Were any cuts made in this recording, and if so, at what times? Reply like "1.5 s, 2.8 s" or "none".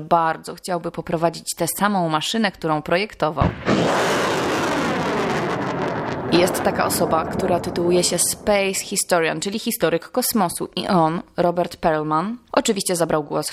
none